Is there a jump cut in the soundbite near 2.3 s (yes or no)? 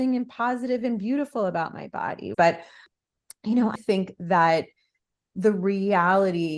yes